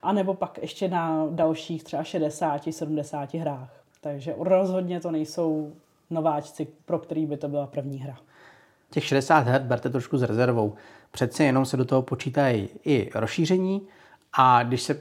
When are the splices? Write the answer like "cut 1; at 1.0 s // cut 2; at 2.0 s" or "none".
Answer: none